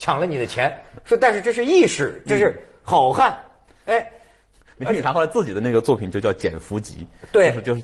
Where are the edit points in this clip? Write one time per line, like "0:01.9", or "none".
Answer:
none